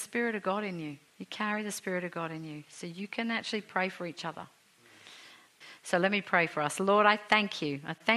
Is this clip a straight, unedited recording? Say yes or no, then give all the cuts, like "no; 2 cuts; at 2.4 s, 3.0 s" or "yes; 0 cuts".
no; 1 cut; at 1.1 s